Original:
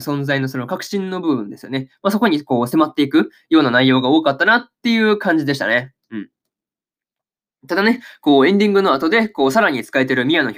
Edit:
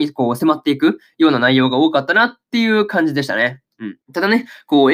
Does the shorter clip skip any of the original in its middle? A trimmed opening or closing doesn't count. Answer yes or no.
yes